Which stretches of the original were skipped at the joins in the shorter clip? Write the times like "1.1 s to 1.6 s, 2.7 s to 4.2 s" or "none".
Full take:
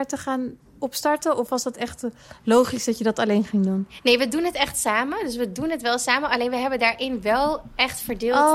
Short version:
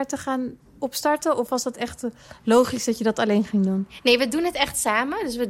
none